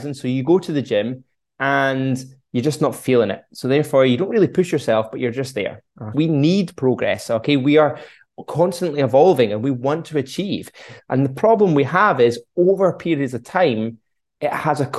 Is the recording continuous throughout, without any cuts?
no; 2 cuts; at 6.1 s, 11.0 s

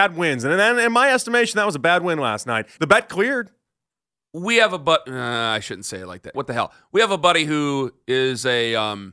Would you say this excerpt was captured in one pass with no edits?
no; 2 cuts; at 2.8 s, 6.3 s

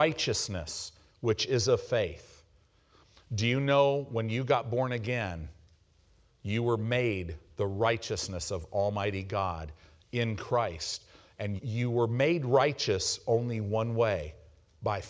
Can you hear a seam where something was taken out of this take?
yes; 1 cut; at 11.6 s

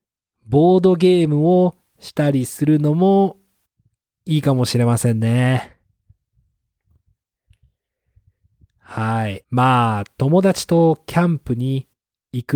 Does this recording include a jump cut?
yes; 1 cut; at 9.4 s

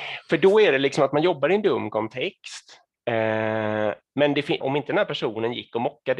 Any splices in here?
yes; 1 cut; at 4.6 s

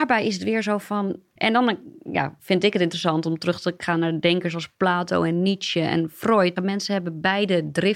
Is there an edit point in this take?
yes; 2 cuts; at 1.4 s, 6.6 s

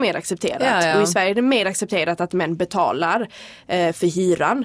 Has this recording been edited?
no; 0 cuts

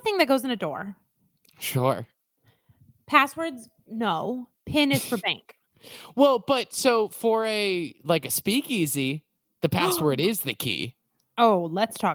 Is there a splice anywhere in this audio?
no; 0 cuts

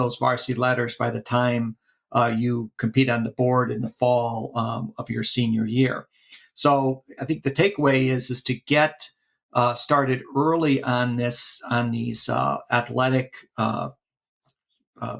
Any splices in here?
no; 0 cuts

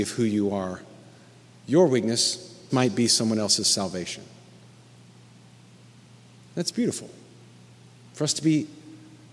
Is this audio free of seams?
no; 1 cut; at 2.7 s

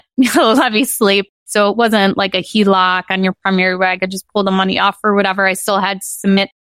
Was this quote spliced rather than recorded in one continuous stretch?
yes; 1 cut; at 1.3 s

